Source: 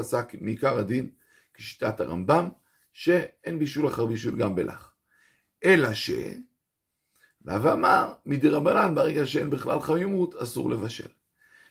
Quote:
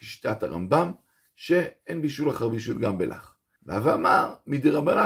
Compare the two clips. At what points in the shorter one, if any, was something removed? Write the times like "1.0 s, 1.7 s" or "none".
3.6 s